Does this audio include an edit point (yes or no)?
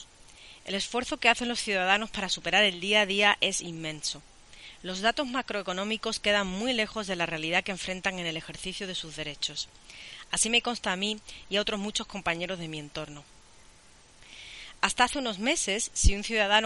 no